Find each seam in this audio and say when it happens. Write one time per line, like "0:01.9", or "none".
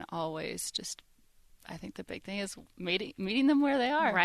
none